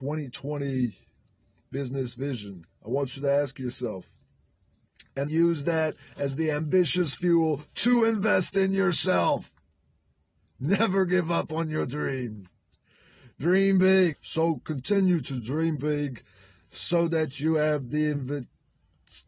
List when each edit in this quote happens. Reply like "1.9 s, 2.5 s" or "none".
5.3 s, 14.1 s